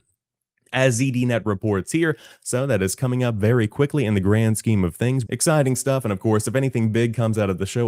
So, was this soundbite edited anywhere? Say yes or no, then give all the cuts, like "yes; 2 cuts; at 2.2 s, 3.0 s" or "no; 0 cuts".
yes; 2 cuts; at 2.3 s, 5.3 s